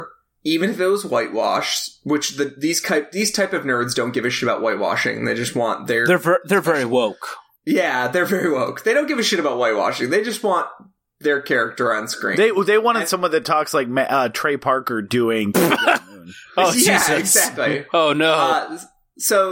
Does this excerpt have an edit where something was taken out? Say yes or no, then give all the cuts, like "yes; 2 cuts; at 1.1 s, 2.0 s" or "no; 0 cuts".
no; 0 cuts